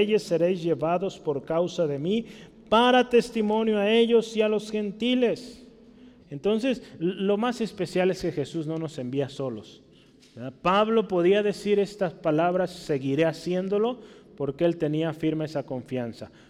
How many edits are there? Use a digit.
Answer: 1